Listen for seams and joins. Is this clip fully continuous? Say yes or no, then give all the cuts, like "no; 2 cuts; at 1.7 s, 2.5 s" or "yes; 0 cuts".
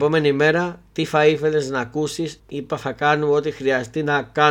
no; 1 cut; at 2.4 s